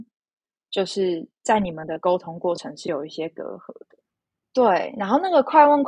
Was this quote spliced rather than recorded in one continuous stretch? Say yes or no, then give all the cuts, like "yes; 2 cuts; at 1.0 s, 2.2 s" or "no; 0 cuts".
yes; 1 cut; at 4.4 s